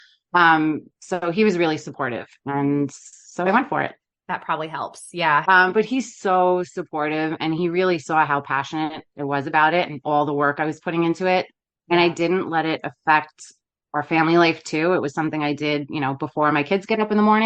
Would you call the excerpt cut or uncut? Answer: cut